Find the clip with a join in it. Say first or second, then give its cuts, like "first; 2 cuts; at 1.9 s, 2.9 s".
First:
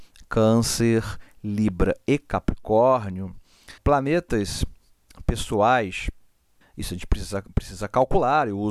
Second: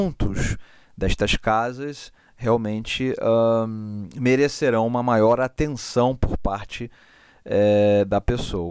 first; 2 cuts; at 3.8 s, 6.6 s